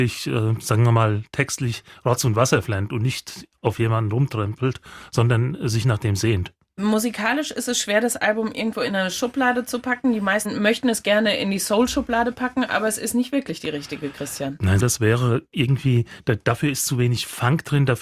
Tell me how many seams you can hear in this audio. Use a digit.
1